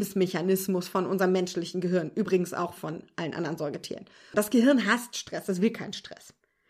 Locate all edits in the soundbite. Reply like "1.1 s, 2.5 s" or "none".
4.3 s